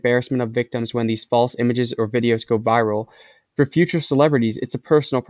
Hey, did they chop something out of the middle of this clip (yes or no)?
yes